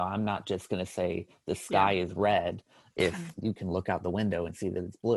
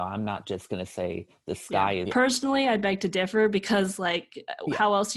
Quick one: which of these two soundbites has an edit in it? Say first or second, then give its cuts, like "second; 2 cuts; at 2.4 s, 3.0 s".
second; 1 cut; at 2.0 s